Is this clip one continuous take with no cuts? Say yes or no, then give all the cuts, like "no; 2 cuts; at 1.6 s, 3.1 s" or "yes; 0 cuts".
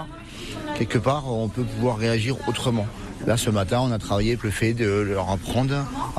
no; 2 cuts; at 3.2 s, 4.4 s